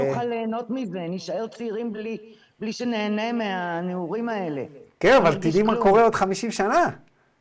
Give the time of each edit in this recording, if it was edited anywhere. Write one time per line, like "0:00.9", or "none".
none